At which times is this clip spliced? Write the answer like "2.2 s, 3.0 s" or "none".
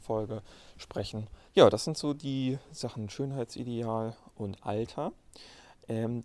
1.5 s